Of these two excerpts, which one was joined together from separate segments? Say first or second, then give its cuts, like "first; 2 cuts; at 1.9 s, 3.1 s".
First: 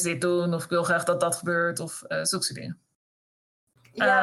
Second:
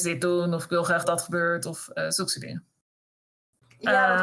second; 1 cut; at 1.0 s